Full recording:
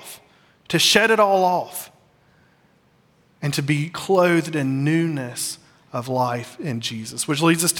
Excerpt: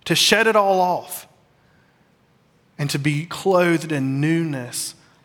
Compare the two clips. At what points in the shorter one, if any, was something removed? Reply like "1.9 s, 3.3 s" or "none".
none